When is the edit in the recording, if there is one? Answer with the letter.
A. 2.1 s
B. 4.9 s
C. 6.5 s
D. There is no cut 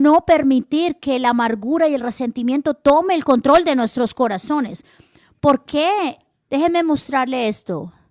C